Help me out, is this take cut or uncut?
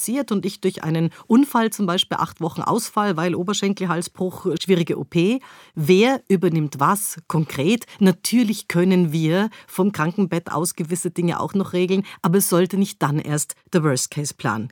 cut